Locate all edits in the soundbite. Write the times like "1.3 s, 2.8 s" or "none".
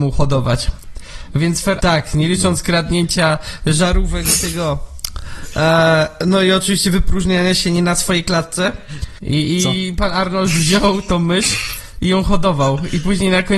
1.8 s, 9.2 s